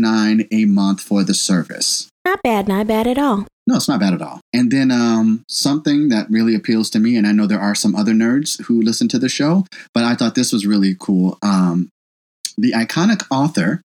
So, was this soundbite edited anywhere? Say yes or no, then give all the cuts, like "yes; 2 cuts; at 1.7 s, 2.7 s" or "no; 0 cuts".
no; 0 cuts